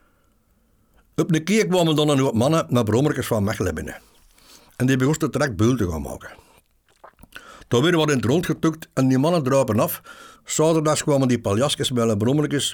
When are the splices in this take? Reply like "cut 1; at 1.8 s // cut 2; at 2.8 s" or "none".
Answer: cut 1; at 10.3 s